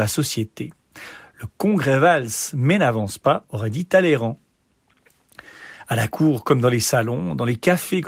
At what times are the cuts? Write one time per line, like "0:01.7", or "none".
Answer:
none